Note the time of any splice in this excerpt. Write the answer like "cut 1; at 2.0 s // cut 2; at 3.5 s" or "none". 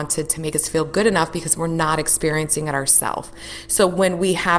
none